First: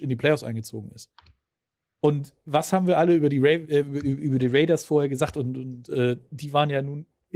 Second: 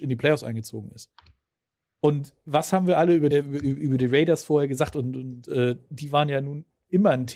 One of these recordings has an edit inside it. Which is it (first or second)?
second